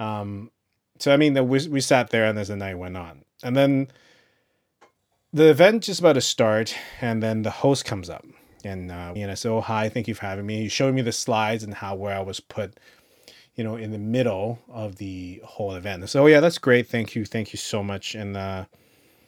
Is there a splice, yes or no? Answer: yes